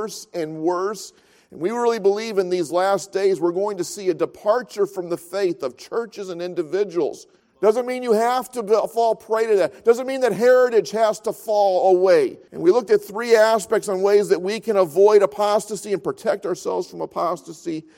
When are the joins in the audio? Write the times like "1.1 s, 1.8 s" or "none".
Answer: 7.4 s, 12.5 s

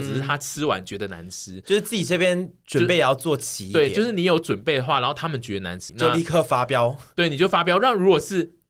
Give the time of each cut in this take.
5.9 s

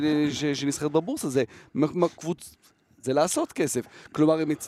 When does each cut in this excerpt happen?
3.0 s

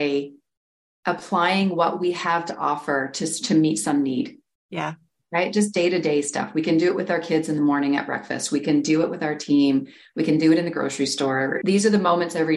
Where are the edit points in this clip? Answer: none

